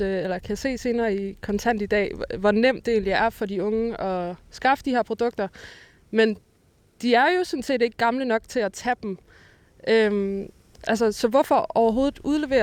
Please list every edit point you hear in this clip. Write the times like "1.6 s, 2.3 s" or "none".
none